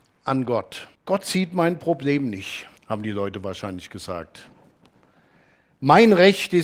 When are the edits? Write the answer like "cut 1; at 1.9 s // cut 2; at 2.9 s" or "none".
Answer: cut 1; at 1.0 s // cut 2; at 2.8 s